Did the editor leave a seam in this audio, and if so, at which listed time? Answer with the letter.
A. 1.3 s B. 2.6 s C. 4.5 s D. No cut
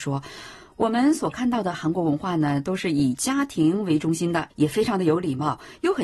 C